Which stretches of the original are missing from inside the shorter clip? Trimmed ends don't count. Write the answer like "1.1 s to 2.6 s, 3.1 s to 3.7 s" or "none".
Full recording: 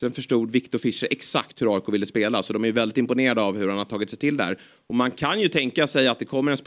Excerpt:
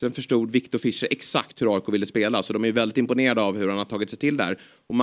none